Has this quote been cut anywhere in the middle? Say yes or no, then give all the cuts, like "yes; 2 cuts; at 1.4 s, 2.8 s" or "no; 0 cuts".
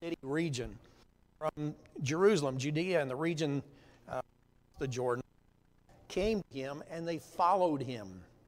no; 0 cuts